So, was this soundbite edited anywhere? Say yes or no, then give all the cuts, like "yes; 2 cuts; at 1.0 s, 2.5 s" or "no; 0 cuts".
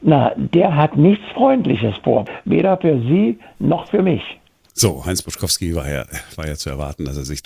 no; 0 cuts